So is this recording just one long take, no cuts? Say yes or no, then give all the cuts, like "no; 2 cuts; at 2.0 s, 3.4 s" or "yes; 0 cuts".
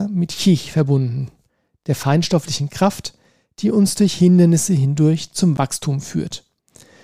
yes; 0 cuts